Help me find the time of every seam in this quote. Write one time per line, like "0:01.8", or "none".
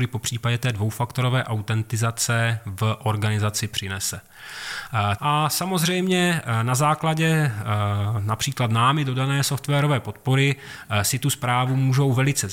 0:05.2